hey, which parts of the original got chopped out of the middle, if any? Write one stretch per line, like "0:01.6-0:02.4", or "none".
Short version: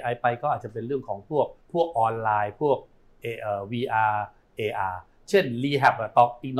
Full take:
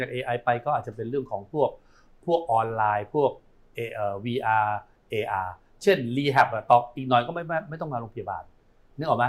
0:01.8-0:02.1